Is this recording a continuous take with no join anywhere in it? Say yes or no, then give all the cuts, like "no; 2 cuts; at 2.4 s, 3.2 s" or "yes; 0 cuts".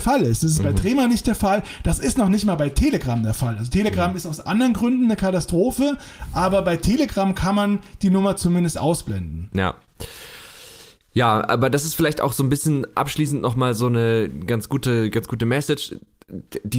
no; 1 cut; at 9.5 s